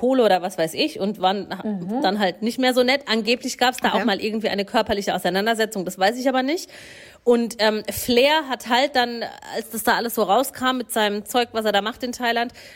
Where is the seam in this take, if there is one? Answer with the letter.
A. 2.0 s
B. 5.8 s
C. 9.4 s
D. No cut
D